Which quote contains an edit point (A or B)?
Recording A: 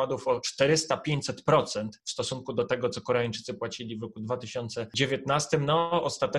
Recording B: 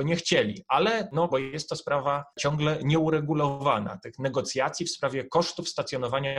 B